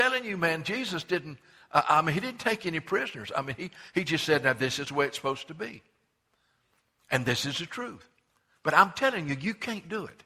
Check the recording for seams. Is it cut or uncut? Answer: uncut